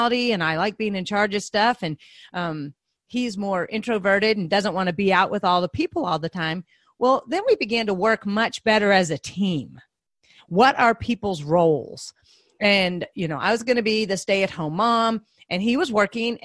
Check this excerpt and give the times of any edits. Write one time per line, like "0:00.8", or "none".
0:10.4